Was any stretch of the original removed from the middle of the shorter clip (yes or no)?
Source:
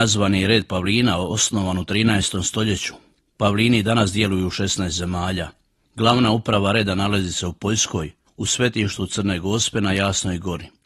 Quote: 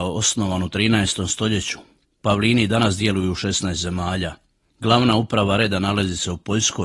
no